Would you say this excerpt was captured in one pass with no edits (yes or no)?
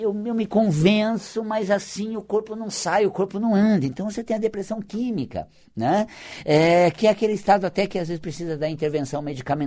yes